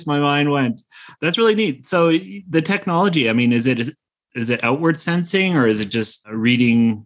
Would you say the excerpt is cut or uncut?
uncut